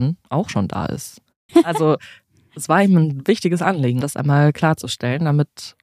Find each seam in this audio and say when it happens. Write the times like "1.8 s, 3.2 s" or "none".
1.5 s, 4.0 s

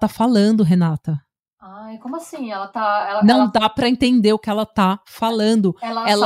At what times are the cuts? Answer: none

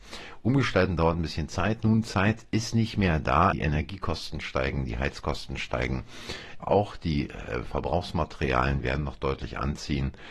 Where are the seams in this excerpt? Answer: 3.5 s, 6.6 s

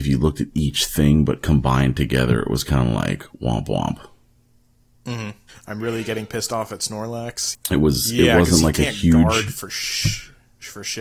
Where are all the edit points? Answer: 5.5 s, 7.5 s

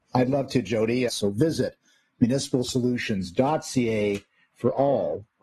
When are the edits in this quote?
1.1 s

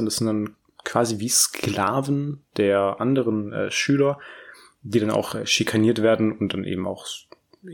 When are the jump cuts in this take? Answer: none

